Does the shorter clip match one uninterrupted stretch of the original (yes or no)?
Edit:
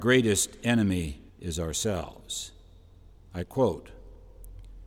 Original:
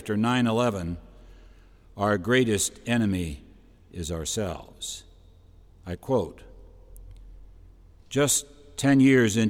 no